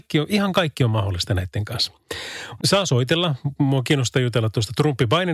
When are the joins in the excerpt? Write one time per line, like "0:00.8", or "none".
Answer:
0:02.6